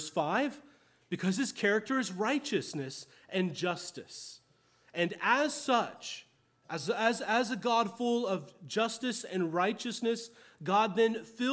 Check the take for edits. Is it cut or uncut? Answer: uncut